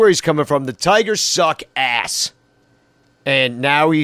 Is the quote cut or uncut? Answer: uncut